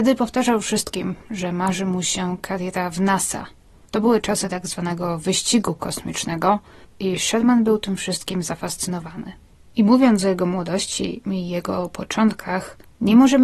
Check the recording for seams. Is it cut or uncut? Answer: uncut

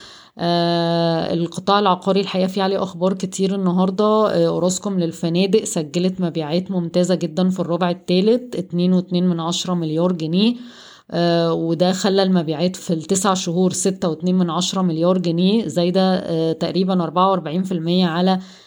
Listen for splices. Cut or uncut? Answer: cut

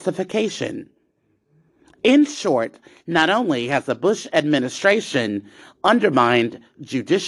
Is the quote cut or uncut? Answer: uncut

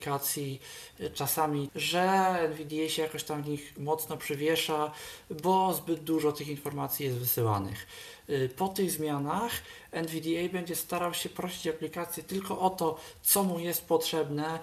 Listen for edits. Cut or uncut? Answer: cut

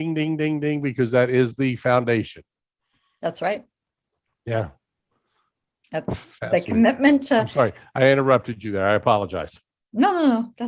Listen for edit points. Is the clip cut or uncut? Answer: uncut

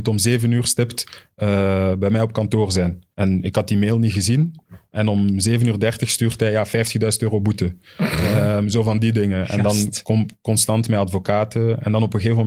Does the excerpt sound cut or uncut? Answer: cut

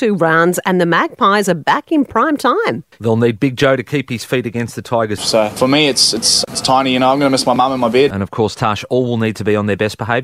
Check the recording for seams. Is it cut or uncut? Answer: cut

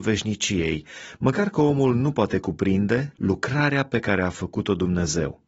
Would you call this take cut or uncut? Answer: cut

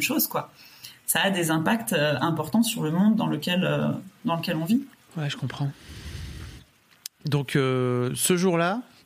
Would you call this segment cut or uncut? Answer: uncut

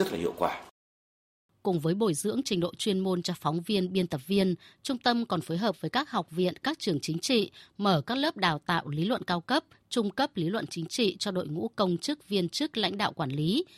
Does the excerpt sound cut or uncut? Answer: uncut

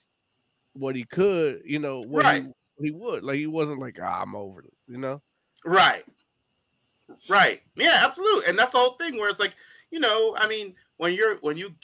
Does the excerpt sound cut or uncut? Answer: uncut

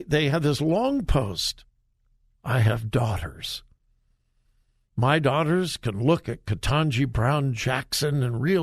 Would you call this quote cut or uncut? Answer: cut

